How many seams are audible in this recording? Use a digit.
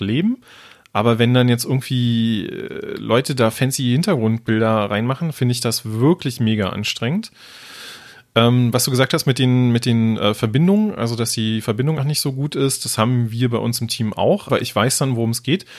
2